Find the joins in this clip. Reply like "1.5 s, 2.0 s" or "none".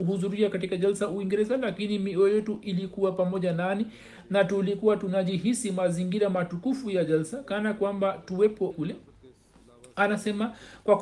8.7 s